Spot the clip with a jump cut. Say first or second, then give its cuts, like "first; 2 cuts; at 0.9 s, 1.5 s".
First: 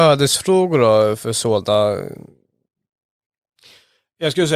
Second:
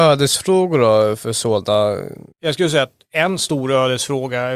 second; 1 cut; at 2.3 s